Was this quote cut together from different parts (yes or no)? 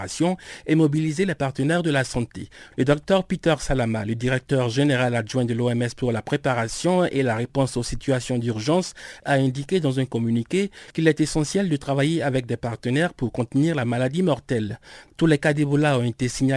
yes